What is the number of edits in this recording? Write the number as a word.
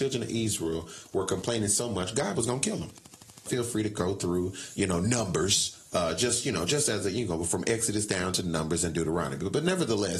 one